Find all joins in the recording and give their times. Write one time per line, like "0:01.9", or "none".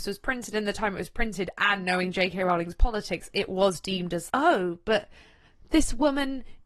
0:04.3